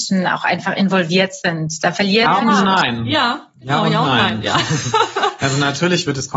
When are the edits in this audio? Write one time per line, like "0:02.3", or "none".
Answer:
none